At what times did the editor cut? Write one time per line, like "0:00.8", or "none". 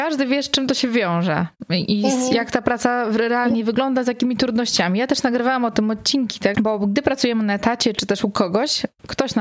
0:06.5